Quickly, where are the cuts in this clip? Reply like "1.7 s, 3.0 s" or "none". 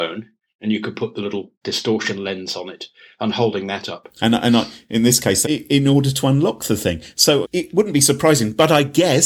4.2 s, 5.4 s, 7.4 s

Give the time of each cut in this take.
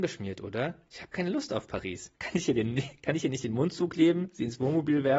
2.1 s

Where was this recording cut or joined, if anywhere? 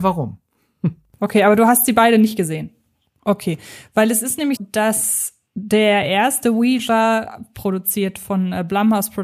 3.1 s, 4.6 s

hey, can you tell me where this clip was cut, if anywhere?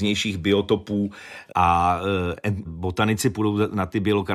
1.5 s, 2.6 s

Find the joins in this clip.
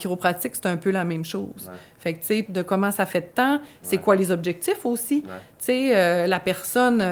2.5 s

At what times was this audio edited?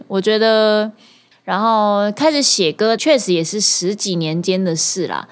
1.3 s, 3.0 s

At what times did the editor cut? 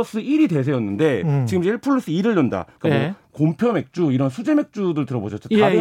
2.8 s

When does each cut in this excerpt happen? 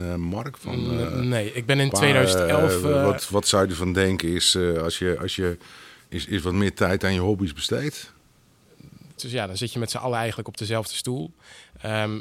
9.2 s

